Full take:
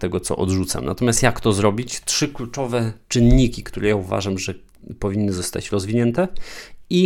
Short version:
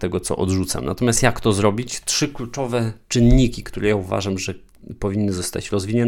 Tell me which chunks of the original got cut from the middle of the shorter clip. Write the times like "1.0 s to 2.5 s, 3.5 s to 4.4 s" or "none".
none